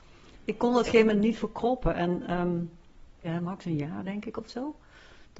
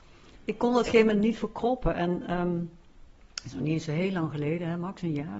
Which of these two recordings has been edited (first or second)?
first